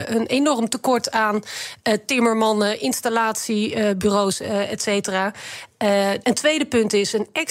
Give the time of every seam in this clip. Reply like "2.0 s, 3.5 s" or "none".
6.2 s